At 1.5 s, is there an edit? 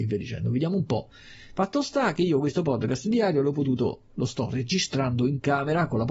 no; 1 cut; at 4.1 s

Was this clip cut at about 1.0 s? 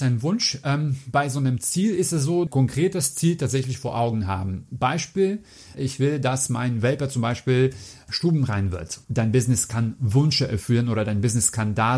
no; 3 cuts; at 2.5 s, 5.7 s, 9.0 s

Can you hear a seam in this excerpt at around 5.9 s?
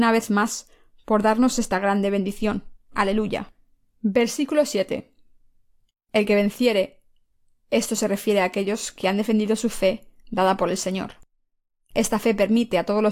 yes; 1 cut; at 5.9 s

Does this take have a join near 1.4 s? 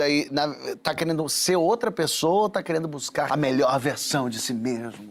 no; 1 cut; at 3.3 s

